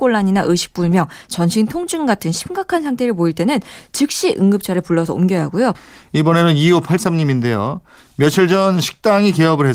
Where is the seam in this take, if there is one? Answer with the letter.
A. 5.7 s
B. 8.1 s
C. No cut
A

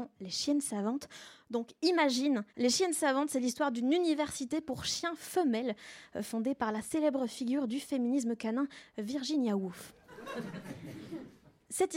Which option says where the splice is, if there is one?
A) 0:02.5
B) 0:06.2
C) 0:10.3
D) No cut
A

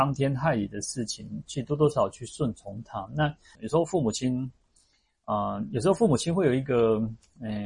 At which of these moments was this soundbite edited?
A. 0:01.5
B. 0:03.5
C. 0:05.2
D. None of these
B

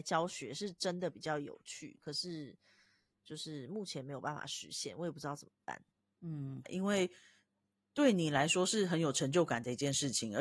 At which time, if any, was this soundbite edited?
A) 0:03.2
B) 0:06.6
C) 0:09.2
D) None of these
B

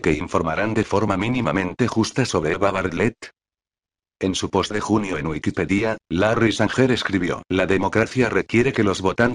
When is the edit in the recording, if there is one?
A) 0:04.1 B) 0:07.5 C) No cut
B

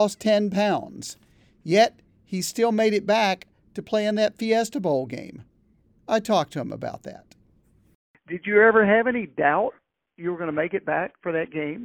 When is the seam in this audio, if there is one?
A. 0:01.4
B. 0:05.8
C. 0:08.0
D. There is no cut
D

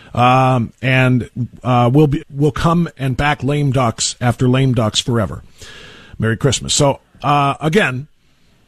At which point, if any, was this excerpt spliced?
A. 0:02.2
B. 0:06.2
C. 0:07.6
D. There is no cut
A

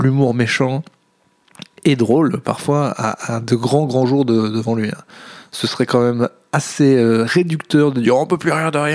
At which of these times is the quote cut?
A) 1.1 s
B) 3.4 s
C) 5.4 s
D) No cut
D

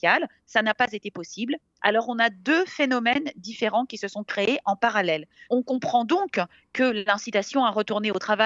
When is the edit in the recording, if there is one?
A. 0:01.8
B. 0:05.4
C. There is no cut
B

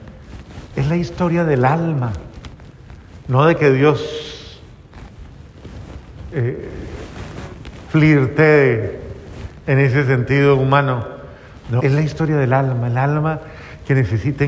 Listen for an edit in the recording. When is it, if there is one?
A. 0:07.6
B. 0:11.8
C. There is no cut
B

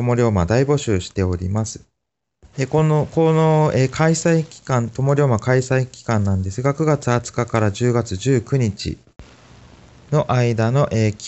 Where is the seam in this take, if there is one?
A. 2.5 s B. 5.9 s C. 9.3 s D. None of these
A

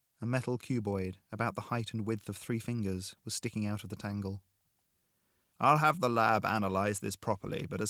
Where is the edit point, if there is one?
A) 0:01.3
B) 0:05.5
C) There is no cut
B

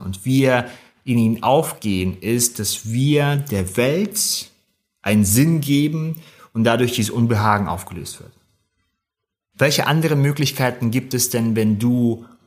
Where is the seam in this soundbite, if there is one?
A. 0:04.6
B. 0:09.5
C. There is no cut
B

